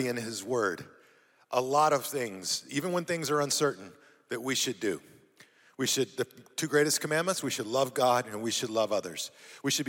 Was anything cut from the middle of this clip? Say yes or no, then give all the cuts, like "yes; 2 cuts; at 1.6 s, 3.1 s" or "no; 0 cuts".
no; 0 cuts